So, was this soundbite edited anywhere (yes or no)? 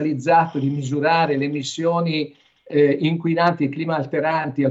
no